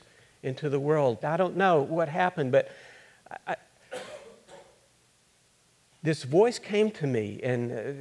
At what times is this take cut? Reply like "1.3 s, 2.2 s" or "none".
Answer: 1.2 s, 5.9 s